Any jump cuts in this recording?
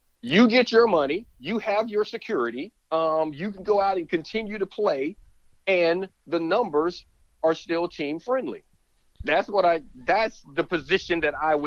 yes; 1 cut; at 2.8 s

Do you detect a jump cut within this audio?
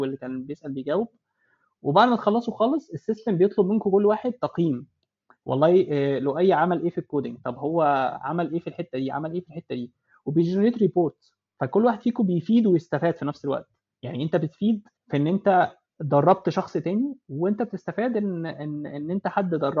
yes; 1 cut; at 15.0 s

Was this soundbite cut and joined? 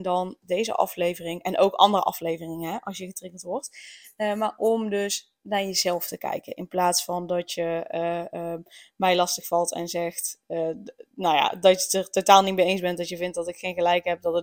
no; 0 cuts

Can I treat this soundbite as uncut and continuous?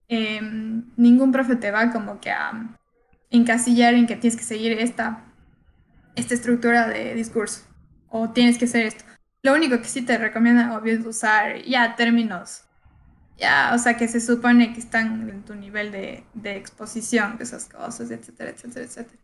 no; 2 cuts; at 15.3 s, 17.4 s

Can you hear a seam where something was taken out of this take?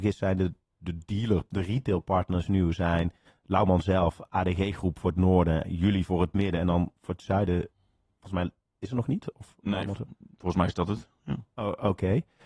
no; 0 cuts

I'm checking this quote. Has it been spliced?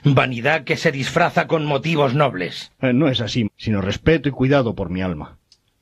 yes; 1 cut; at 3.5 s

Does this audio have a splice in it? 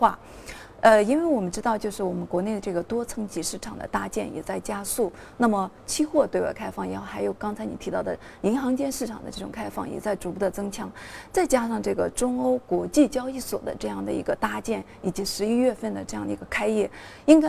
no; 0 cuts

